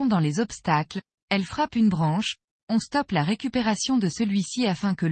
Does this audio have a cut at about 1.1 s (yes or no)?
yes